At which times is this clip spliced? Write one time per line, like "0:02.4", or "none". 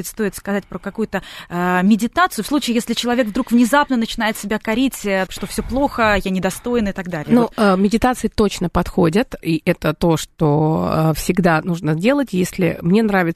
0:05.3
0:09.4